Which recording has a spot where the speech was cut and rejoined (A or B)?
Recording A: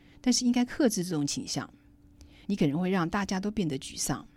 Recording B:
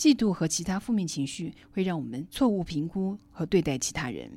A